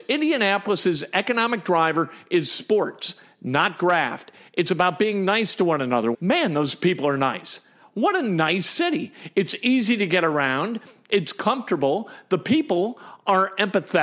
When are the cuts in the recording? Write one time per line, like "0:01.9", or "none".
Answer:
0:06.1